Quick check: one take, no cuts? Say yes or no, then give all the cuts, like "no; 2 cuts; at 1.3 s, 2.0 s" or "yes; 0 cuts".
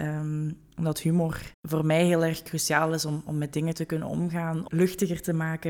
no; 2 cuts; at 1.5 s, 4.7 s